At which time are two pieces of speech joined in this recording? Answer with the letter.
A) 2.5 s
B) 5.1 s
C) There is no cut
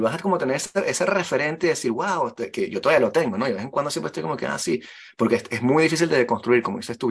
C